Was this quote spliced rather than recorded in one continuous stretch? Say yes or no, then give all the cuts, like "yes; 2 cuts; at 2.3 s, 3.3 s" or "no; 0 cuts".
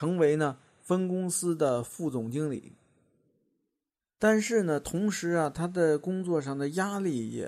no; 0 cuts